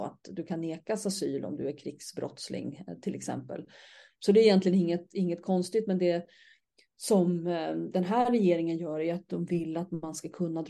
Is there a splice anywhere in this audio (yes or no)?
no